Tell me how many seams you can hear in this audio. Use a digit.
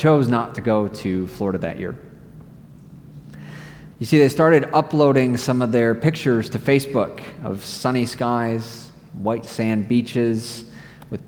1